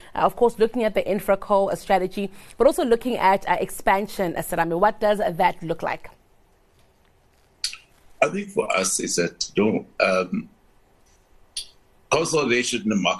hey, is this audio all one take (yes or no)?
yes